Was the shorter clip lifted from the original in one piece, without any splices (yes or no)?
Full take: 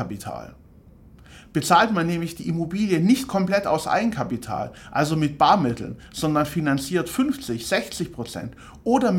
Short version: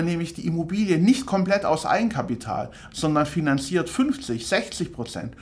no